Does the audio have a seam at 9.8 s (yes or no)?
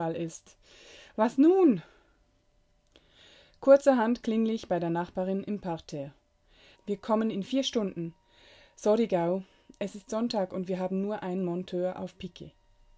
no